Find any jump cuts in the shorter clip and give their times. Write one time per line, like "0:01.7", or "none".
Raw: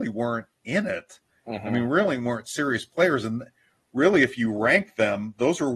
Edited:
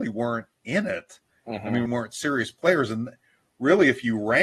0:01.9

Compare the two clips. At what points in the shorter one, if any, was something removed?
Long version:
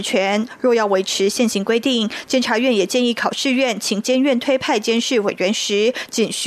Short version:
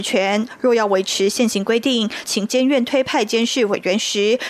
0:02.3

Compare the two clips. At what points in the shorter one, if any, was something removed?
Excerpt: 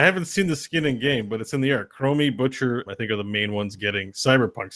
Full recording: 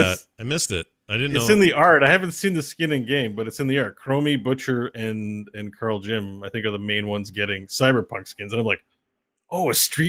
0:02.9

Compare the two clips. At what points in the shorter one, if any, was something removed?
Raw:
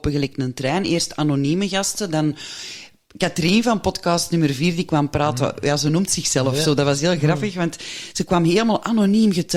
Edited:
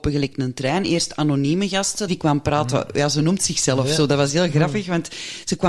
0:02.1

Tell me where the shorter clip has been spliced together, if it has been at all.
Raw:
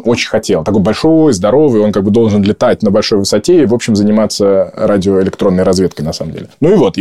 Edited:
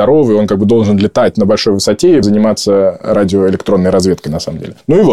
0:02.2

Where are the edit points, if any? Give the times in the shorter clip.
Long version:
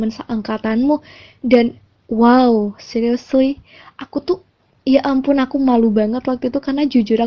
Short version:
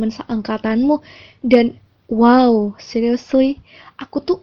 none

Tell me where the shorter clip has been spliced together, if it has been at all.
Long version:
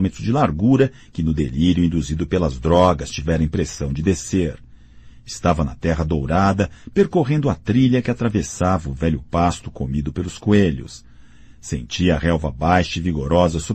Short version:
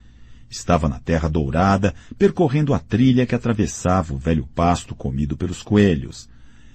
none

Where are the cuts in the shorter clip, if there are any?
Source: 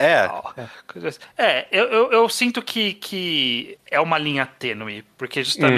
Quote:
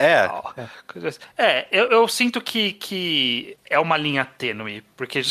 0:01.9

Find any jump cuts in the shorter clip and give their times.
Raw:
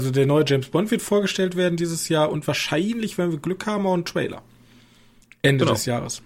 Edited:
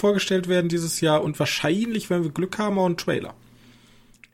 none

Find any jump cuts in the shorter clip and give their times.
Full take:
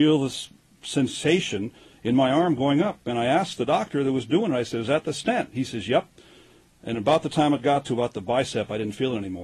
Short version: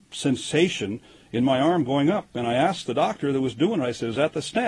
none

